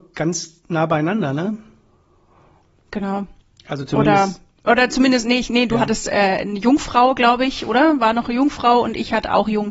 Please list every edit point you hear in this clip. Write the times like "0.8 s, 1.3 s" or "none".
none